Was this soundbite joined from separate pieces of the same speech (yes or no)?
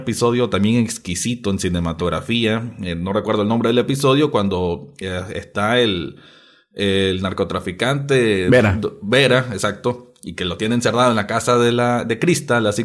no